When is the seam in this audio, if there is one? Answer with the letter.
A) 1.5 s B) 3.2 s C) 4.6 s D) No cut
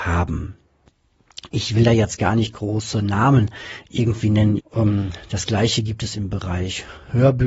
C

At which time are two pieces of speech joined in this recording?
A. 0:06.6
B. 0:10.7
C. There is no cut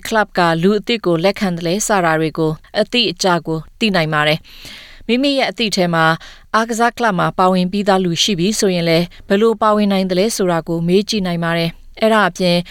C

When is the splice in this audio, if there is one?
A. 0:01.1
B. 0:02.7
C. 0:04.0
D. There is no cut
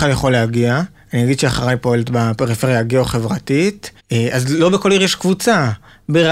C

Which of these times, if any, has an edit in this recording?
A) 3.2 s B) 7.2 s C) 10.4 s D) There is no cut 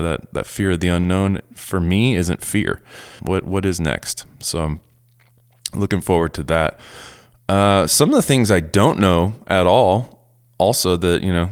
A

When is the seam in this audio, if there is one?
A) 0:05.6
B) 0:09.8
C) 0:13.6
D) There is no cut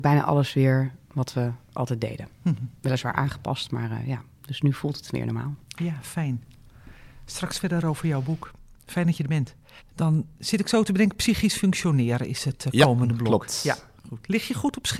B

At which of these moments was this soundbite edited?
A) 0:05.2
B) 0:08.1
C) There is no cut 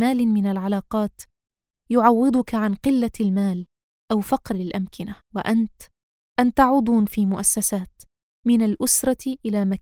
A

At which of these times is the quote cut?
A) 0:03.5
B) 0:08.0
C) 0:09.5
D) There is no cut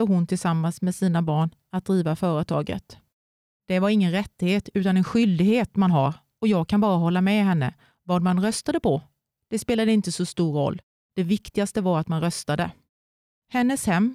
A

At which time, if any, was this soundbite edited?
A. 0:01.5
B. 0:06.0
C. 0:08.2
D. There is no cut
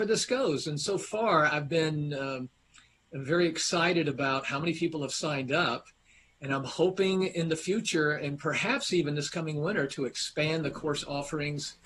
D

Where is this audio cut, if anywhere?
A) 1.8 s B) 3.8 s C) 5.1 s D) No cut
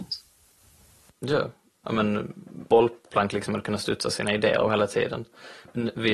A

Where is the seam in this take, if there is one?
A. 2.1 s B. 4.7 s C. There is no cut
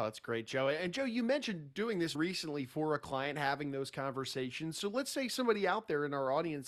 A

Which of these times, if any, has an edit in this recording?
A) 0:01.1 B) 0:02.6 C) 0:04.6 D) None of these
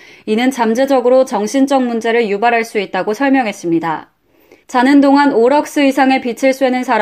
C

